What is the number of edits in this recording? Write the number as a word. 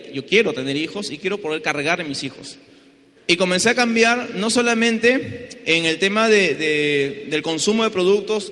one